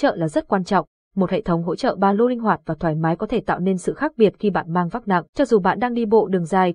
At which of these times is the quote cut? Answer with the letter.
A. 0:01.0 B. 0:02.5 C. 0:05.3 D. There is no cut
C